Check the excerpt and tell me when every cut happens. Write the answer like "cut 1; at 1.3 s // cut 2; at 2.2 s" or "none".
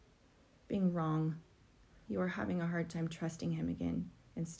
cut 1; at 2.1 s

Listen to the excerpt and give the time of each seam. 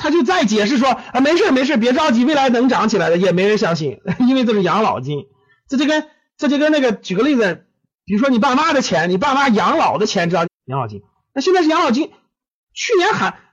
cut 1; at 10.4 s

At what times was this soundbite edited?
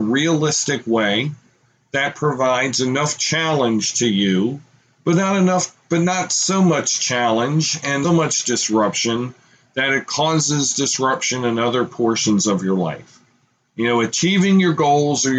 cut 1; at 8.0 s

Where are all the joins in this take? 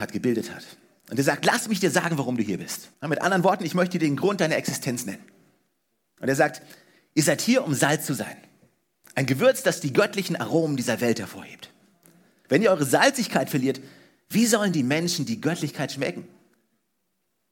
cut 1; at 2.9 s

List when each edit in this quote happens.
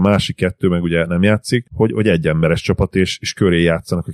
none

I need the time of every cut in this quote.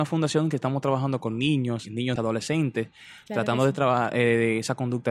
cut 1; at 2.2 s

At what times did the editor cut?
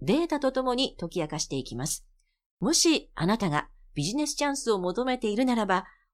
none

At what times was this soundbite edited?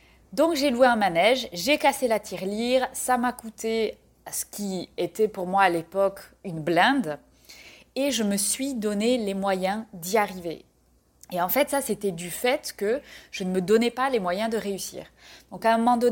cut 1; at 11.1 s

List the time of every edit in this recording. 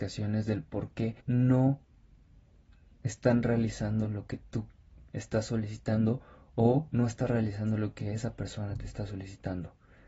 cut 1; at 1.2 s

